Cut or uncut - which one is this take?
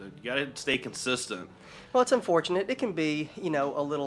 uncut